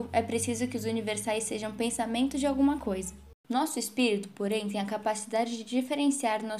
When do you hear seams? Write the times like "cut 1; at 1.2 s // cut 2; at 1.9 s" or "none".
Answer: cut 1; at 3.4 s